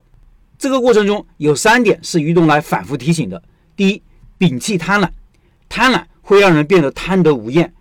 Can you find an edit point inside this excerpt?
no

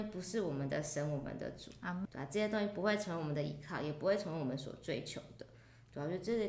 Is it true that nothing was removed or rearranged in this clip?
no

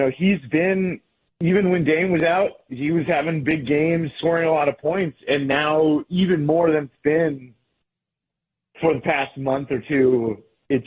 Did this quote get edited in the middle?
no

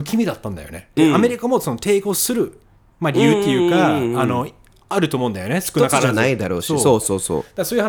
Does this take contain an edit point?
yes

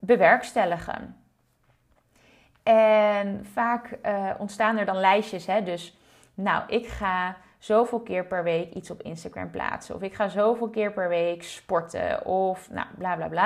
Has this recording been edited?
no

